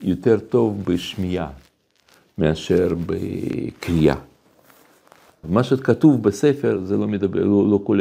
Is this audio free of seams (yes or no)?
no